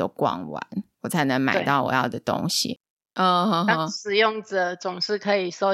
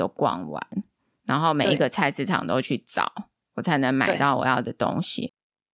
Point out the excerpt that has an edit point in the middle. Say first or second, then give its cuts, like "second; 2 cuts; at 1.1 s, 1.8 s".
first; 2 cuts; at 0.9 s, 3.0 s